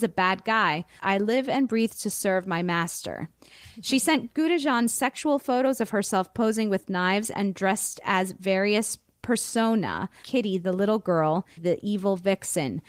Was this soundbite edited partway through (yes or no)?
yes